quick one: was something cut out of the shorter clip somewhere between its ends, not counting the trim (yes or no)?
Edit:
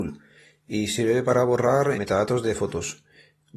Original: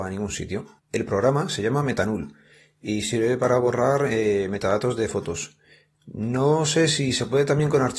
yes